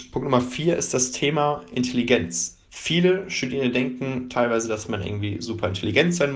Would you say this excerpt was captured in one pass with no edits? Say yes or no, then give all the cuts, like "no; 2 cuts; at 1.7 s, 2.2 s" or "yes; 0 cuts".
no; 1 cut; at 2.6 s